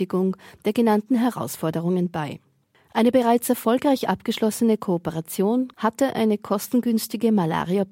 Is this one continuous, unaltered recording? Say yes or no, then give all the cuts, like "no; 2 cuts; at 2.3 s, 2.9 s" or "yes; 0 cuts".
no; 1 cut; at 5.7 s